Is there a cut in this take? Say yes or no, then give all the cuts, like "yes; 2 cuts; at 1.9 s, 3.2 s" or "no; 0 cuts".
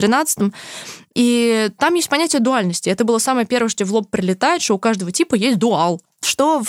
no; 0 cuts